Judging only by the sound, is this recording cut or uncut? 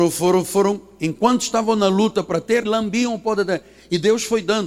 cut